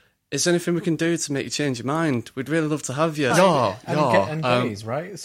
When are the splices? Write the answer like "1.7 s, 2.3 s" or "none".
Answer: 3.3 s